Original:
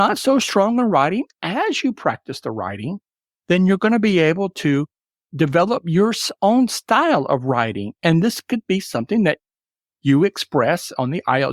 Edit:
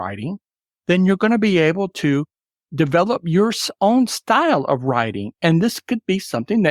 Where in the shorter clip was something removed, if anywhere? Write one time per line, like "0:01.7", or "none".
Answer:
none